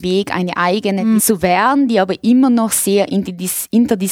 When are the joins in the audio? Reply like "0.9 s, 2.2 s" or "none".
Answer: 1.2 s